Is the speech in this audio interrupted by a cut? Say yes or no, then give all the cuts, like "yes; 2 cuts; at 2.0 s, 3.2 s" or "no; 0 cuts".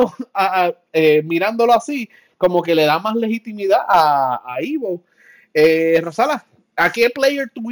no; 0 cuts